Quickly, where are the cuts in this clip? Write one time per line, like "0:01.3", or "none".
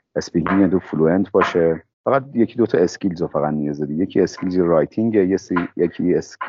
0:01.9